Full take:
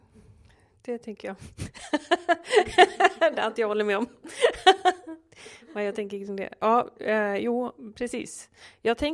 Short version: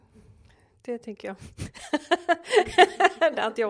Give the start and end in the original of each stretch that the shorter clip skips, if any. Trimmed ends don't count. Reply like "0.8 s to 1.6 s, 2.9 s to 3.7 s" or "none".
none